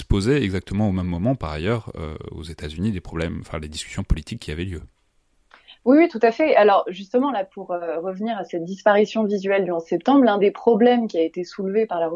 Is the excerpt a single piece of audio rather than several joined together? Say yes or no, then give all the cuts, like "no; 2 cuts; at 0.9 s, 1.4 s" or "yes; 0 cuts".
yes; 0 cuts